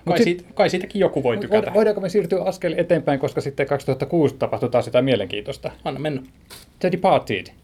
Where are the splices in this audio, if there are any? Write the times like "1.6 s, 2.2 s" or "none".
none